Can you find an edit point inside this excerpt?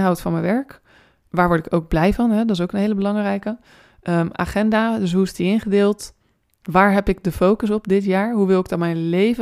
no; 0 cuts

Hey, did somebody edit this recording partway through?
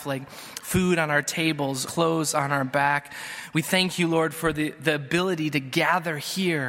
yes; 1 cut; at 1.8 s

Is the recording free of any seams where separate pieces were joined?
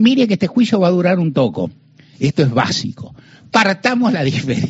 no; 1 cut; at 2.1 s

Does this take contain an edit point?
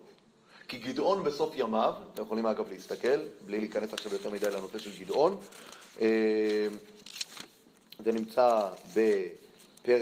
no; 0 cuts

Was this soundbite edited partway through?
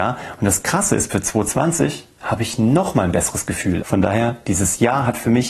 yes; 1 cut; at 3.8 s

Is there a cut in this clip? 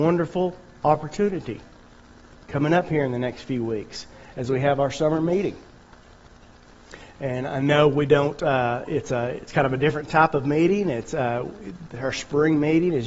no; 0 cuts

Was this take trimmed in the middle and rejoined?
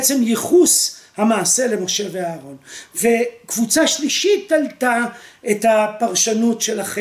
no; 0 cuts

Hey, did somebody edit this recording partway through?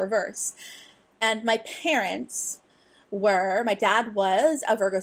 no; 0 cuts

